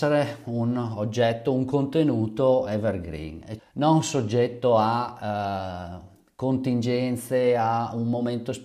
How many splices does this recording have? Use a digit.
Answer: 1